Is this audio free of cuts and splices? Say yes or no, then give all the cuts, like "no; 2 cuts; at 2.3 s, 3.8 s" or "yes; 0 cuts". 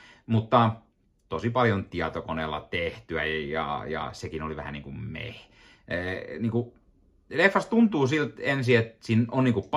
yes; 0 cuts